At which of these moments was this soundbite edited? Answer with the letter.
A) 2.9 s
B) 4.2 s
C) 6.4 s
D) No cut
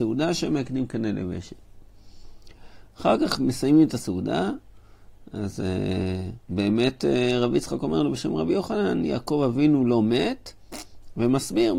C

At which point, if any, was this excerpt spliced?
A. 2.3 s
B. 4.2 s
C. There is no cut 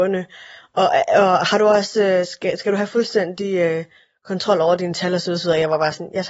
C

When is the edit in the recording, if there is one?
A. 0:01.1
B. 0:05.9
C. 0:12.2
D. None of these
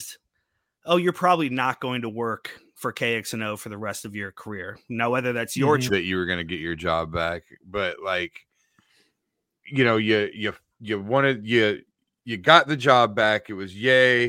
B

